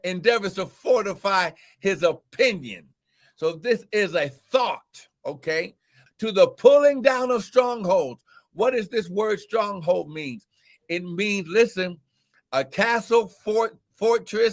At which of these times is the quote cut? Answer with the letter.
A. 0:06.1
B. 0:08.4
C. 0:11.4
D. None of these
A